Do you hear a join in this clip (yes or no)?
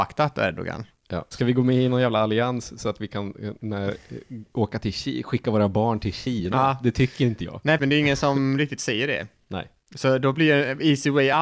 yes